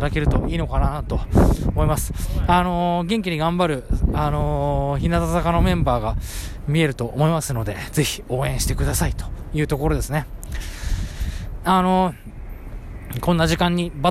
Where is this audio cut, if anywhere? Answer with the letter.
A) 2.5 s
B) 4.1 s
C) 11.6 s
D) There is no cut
C